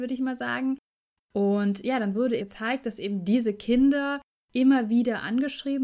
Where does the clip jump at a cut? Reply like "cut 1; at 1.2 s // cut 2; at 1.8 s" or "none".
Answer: cut 1; at 1.2 s // cut 2; at 2.4 s